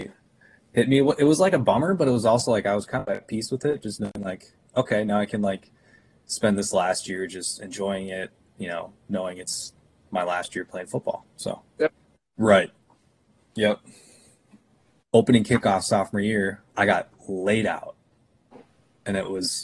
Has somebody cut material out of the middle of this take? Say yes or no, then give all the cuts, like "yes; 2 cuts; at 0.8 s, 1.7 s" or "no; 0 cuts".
yes; 3 cuts; at 12.3 s, 15.0 s, 16.7 s